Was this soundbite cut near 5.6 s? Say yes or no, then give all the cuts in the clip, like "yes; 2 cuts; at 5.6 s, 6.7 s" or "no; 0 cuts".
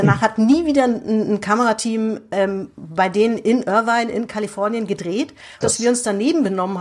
yes; 1 cut; at 5.6 s